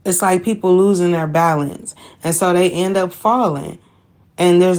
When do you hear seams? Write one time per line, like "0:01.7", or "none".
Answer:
none